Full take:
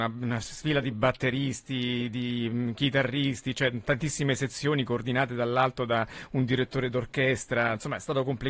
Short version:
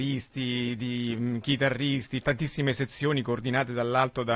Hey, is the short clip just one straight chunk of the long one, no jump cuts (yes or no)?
no